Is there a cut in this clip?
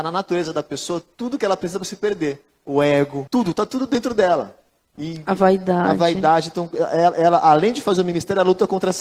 yes; 1 cut; at 3.3 s

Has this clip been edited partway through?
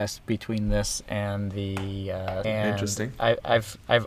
yes; 1 cut; at 2.4 s

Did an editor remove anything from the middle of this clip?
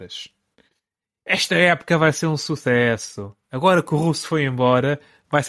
no; 0 cuts

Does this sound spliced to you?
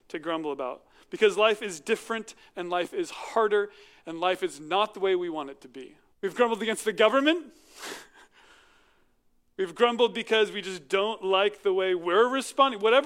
yes; 1 cut; at 6.1 s

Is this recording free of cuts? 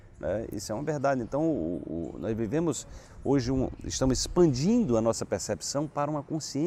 no; 1 cut; at 3.8 s

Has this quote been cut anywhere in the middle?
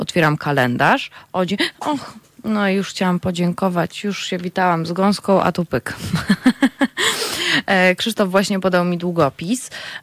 no; 0 cuts

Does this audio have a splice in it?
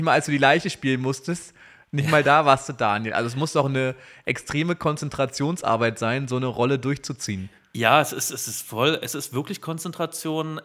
no; 0 cuts

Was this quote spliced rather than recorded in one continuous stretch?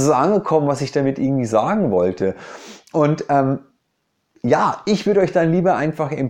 no; 0 cuts

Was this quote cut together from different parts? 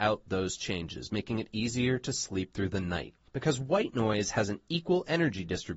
yes; 1 cut; at 3.3 s

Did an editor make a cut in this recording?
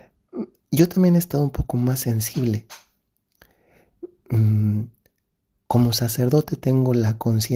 no; 0 cuts

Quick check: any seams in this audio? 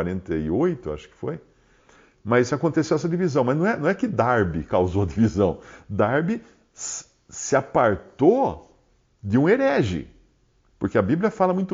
no; 0 cuts

